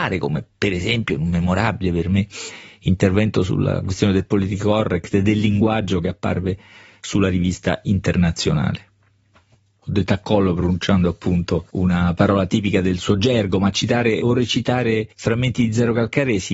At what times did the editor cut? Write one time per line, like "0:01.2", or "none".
0:11.7
0:15.1

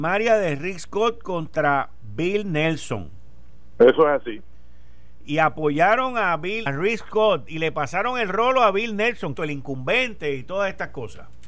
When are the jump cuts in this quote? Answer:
0:06.7
0:09.3

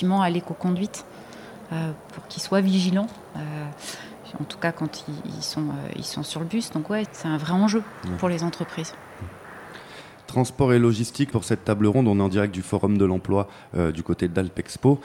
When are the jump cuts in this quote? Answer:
0:07.1
0:11.3

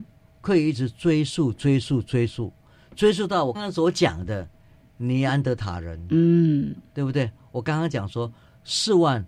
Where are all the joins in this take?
0:03.5

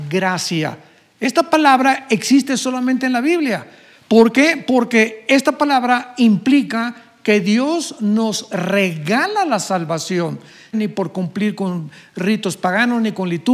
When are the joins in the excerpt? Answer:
0:10.7

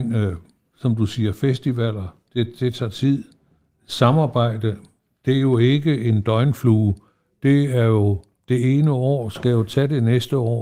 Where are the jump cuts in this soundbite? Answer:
0:02.3

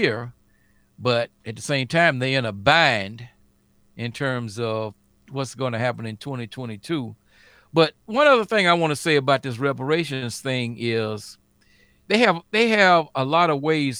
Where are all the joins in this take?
none

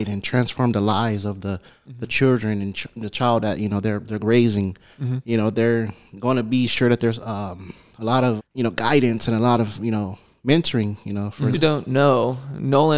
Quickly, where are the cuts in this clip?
0:08.4
0:11.5

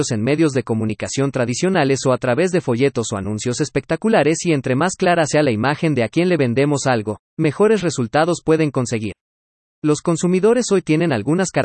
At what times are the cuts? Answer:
none

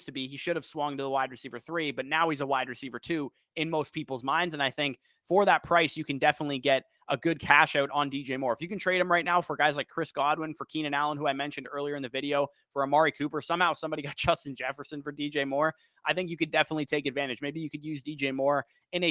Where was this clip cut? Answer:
none

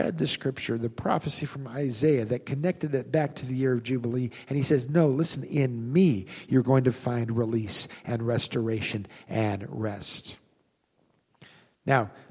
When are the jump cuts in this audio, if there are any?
none

